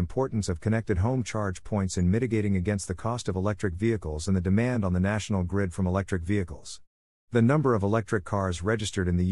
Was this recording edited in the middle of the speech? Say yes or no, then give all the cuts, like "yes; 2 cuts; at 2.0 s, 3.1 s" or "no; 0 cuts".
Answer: yes; 1 cut; at 7.1 s